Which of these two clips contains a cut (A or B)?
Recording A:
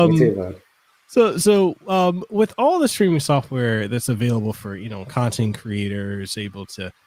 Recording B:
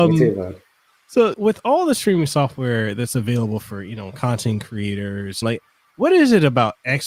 B